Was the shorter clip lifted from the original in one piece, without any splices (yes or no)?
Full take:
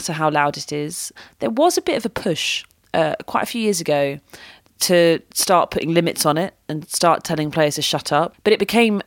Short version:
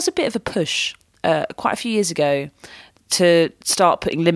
yes